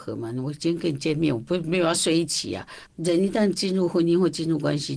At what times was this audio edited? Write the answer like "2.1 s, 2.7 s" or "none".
2.9 s

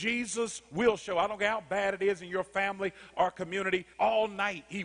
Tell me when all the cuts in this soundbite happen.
3.9 s

